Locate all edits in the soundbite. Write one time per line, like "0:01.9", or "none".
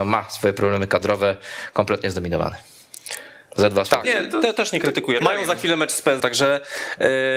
0:04.0
0:05.2
0:06.2